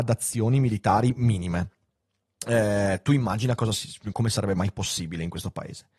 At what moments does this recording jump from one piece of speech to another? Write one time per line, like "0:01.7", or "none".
0:04.1